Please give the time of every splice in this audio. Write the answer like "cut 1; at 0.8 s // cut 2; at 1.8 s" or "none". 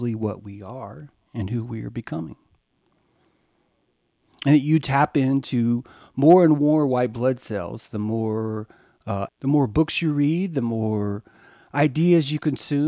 cut 1; at 9.3 s